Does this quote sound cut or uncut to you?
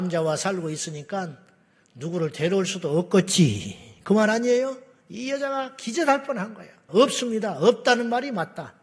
cut